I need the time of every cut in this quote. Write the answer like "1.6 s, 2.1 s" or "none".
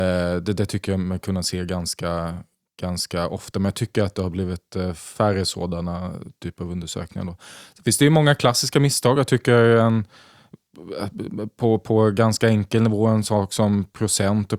none